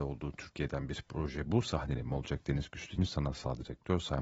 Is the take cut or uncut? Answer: cut